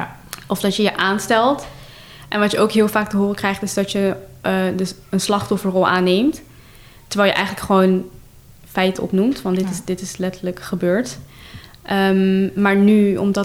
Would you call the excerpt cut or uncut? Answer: uncut